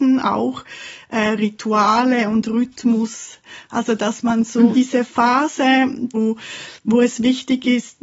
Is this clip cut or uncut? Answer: cut